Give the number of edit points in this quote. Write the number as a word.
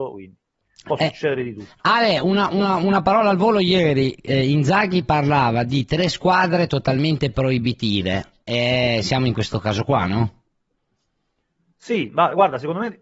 zero